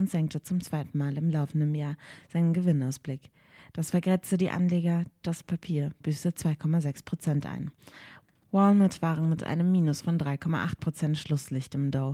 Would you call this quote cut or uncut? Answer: uncut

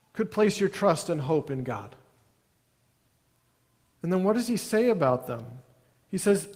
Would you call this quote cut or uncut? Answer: cut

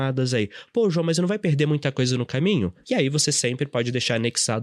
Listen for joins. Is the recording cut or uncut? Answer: cut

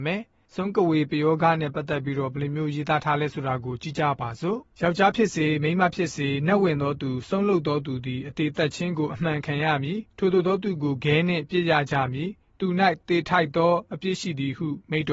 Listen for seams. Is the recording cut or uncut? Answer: cut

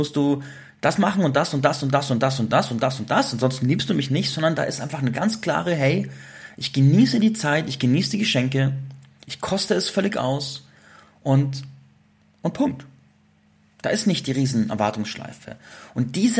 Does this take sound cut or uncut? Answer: uncut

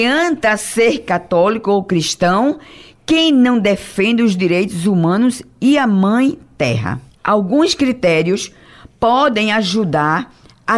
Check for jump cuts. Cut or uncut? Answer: cut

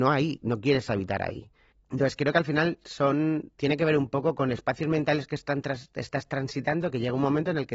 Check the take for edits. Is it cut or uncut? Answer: cut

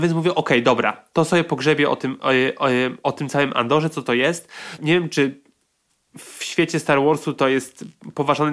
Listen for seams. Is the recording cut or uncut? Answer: cut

